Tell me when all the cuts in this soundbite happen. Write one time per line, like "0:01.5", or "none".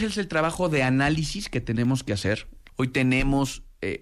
0:02.7